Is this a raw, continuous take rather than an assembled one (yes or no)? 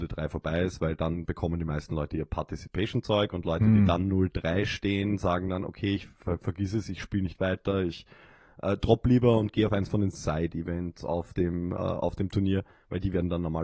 yes